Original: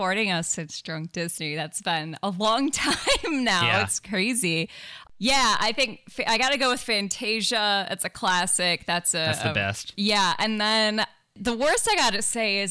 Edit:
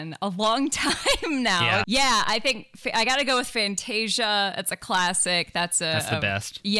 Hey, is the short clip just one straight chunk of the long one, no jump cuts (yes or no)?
no